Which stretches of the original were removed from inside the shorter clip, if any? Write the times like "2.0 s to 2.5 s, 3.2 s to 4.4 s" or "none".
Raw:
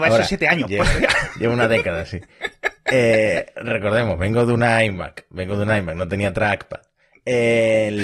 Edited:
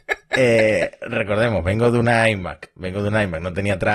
none